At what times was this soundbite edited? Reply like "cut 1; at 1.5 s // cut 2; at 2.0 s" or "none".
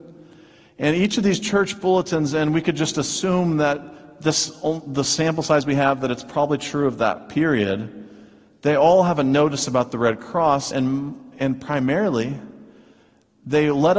none

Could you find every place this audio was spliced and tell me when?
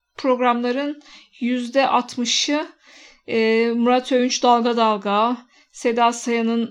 none

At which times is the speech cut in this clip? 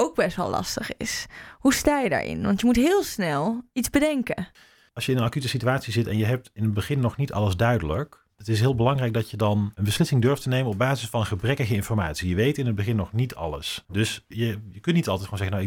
none

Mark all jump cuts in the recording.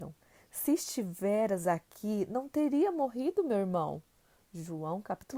none

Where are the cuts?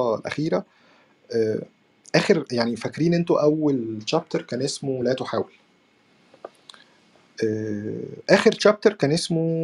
none

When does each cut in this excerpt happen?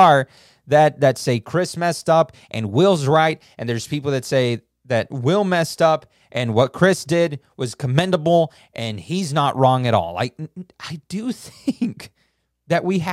none

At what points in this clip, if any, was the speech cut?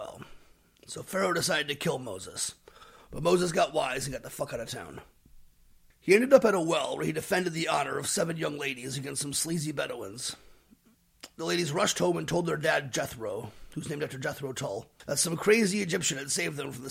none

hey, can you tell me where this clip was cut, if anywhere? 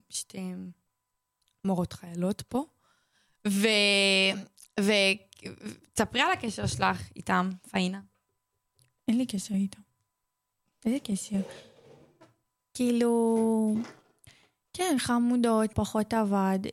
cut 1; at 15.7 s

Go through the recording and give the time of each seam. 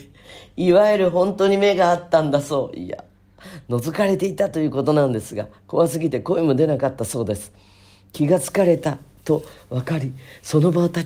none

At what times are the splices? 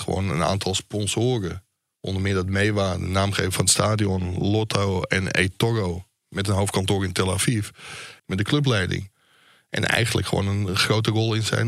cut 1; at 8.2 s

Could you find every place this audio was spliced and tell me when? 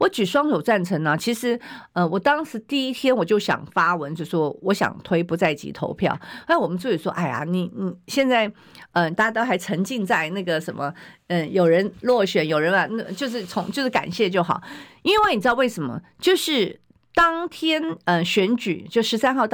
cut 1; at 4.6 s // cut 2; at 9.1 s

